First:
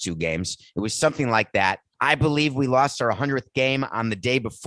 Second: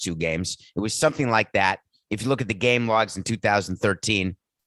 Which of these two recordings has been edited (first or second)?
first